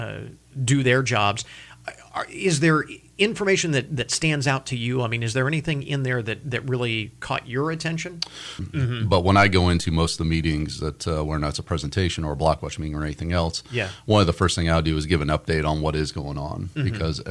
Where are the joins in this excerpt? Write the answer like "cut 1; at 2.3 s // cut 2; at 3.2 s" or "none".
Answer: cut 1; at 8.6 s